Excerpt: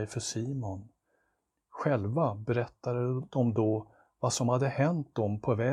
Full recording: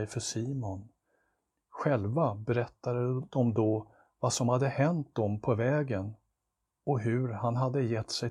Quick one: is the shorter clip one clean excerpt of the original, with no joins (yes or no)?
yes